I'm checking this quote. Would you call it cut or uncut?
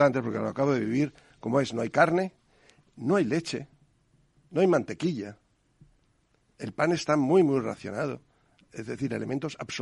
uncut